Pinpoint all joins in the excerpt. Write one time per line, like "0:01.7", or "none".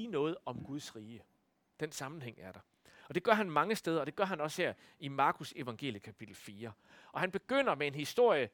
none